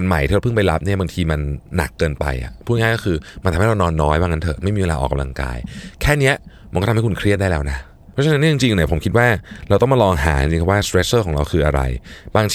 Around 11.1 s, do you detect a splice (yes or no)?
no